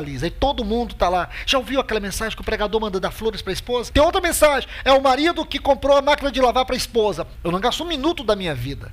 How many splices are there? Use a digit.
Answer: 2